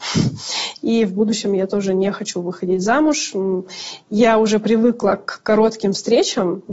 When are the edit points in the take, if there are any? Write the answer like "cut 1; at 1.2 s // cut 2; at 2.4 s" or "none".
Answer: none